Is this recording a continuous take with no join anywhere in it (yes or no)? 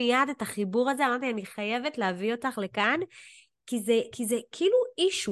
yes